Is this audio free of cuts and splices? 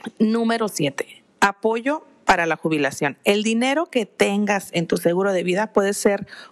no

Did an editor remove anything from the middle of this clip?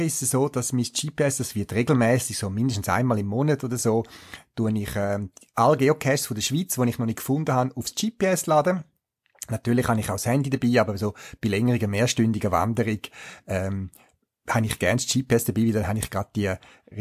no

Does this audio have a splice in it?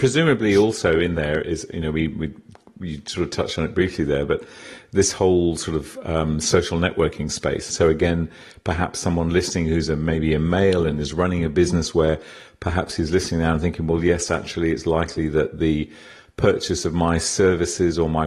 yes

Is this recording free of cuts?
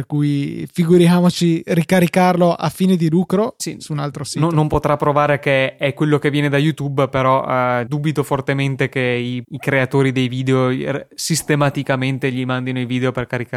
no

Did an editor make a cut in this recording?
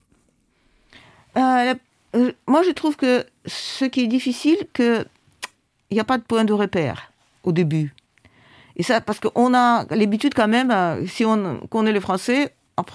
no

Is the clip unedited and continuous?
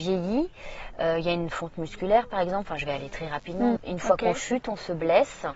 no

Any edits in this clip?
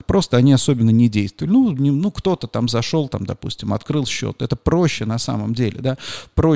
no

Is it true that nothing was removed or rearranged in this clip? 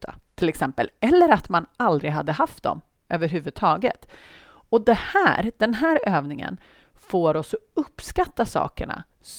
yes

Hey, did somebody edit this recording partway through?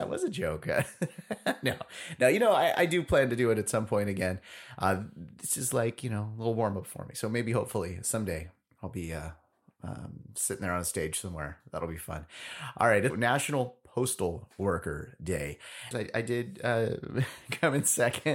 yes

